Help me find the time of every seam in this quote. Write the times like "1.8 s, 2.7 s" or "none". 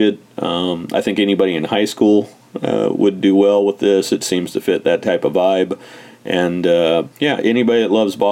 7.1 s